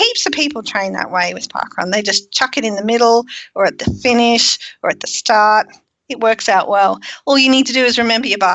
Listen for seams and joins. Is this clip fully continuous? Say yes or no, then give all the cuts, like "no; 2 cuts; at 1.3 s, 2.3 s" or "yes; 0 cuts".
yes; 0 cuts